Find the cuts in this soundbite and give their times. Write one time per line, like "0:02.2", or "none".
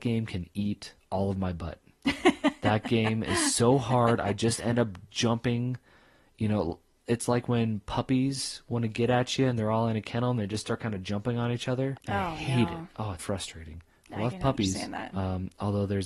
0:12.0
0:13.2
0:15.1